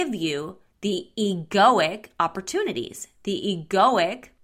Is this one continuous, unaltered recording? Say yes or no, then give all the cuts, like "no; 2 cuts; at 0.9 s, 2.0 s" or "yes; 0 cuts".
yes; 0 cuts